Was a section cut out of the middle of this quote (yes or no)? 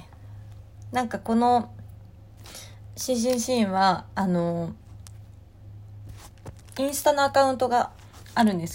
no